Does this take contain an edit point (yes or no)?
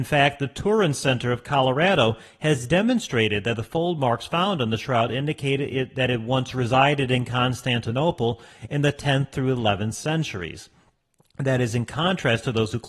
no